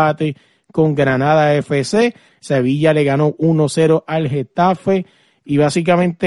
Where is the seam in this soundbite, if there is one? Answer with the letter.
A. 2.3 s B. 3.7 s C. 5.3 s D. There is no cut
A